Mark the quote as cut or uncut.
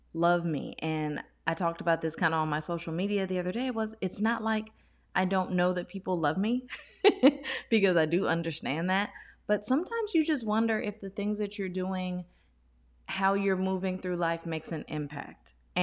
uncut